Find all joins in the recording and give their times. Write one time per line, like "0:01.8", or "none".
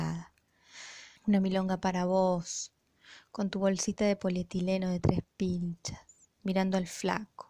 0:01.2

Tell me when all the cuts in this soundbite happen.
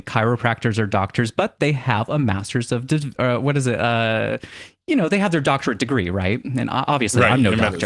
none

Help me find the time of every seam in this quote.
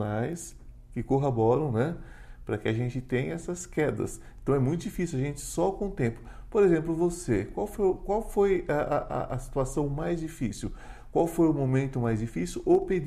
none

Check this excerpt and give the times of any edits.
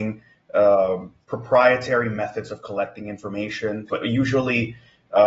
0:01.2
0:03.9

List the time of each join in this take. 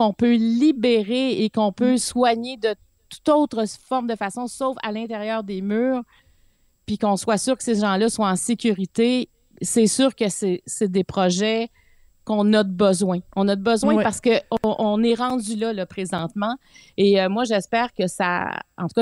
none

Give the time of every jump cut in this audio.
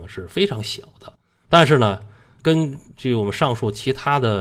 0:01.4

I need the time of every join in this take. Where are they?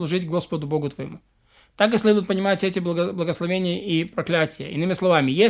none

